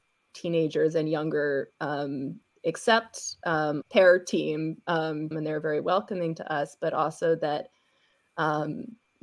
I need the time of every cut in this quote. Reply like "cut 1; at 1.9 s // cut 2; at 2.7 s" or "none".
cut 1; at 3.8 s // cut 2; at 5.3 s

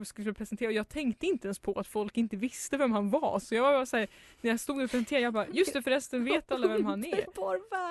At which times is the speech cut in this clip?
none

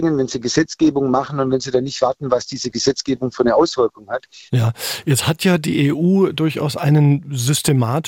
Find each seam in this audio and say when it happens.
cut 1; at 4.5 s

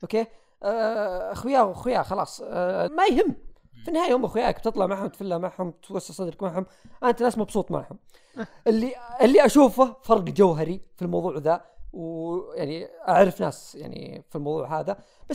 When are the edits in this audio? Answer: cut 1; at 2.9 s

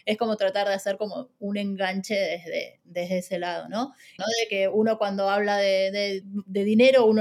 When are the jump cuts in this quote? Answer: cut 1; at 4.2 s // cut 2; at 6.2 s

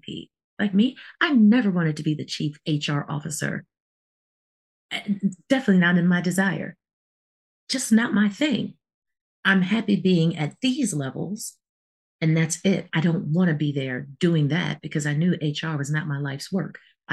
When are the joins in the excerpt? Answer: none

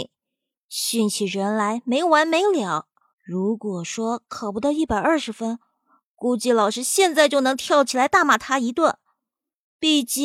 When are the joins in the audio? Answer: cut 1; at 3.1 s

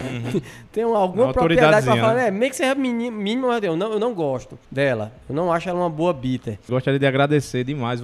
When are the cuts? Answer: cut 1; at 4.7 s // cut 2; at 6.7 s

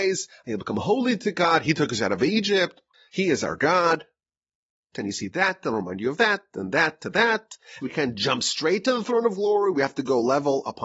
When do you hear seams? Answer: cut 1; at 4.9 s // cut 2; at 7.8 s

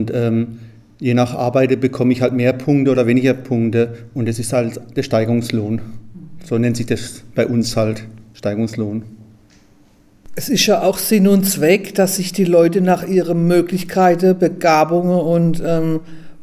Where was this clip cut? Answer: none

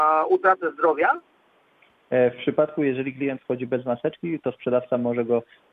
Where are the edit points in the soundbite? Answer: none

